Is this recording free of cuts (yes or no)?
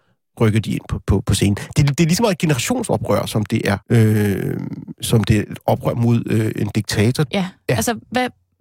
no